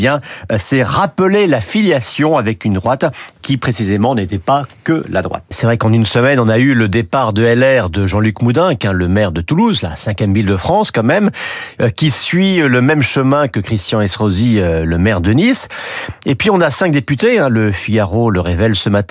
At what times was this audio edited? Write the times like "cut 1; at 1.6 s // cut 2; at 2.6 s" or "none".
cut 1; at 5.5 s